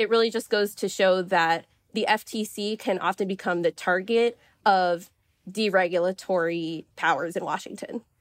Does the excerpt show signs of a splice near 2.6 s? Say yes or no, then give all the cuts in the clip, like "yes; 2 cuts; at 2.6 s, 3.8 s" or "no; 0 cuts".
no; 1 cut; at 6.9 s